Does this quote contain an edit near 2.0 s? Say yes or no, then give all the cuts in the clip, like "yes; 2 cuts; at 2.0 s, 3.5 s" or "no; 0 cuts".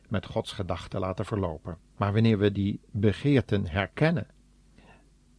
yes; 1 cut; at 2.0 s